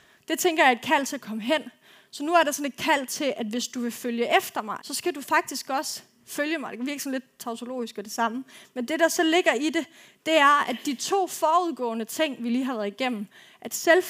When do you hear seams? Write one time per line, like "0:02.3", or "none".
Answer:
0:04.8